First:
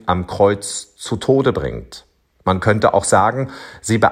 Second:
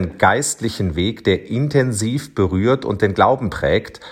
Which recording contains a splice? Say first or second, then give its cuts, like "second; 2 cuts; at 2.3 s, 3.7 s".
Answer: first; 1 cut; at 2.4 s